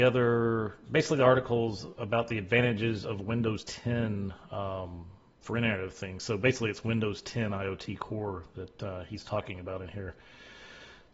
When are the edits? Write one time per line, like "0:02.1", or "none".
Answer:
none